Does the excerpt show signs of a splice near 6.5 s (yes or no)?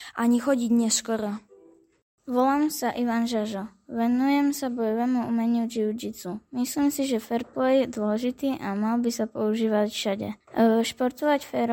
no